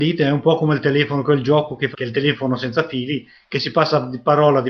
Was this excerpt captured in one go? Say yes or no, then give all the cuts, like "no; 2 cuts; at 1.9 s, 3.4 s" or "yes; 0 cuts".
no; 1 cut; at 1.9 s